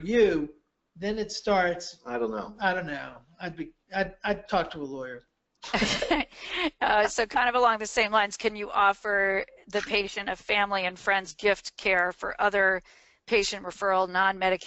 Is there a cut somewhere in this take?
no; 0 cuts

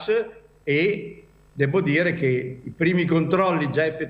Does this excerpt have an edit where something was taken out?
no; 0 cuts

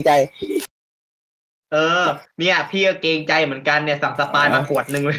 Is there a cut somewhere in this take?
no; 0 cuts

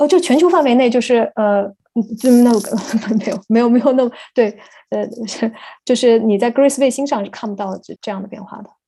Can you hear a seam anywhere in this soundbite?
yes; 1 cut; at 8.0 s

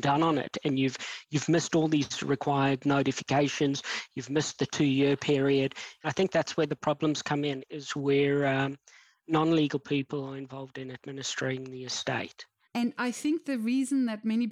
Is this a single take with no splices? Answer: no; 2 cuts; at 6.0 s, 12.6 s

